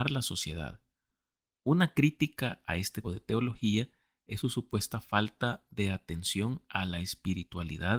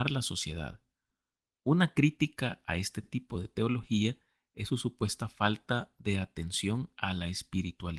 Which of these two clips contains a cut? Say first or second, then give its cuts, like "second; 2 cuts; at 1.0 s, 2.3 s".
first; 1 cut; at 3.0 s